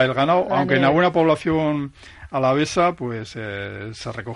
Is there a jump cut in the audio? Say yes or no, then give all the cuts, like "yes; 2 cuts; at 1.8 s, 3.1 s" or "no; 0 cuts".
no; 0 cuts